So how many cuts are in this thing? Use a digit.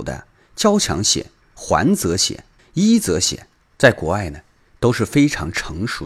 0